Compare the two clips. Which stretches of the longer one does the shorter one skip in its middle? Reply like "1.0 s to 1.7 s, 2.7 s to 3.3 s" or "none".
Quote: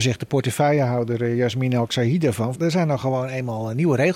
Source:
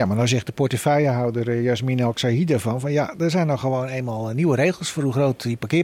2.8 s to 3.1 s